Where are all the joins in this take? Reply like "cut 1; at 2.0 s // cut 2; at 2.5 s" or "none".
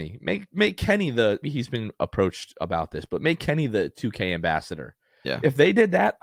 cut 1; at 1.4 s